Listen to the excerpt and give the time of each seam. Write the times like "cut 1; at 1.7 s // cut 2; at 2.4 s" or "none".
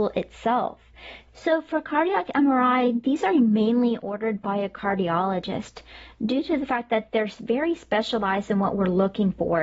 cut 1; at 1.3 s